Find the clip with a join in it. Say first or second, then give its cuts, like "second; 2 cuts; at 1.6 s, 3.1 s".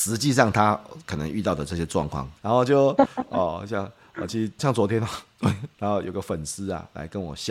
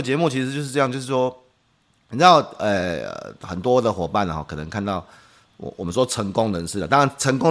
first; 3 cuts; at 2.4 s, 4.6 s, 5.7 s